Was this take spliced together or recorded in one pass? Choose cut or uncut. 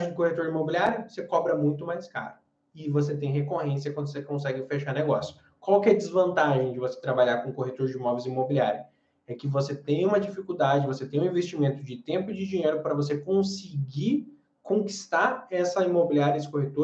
uncut